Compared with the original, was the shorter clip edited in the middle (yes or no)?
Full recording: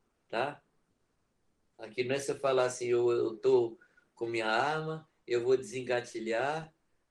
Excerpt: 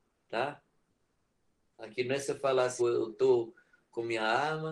yes